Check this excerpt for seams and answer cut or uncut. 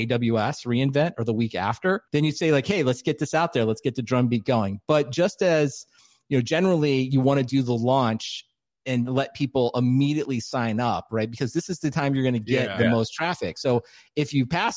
cut